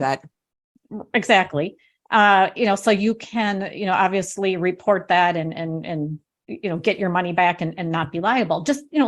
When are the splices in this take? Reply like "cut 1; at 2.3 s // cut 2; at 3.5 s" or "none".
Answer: none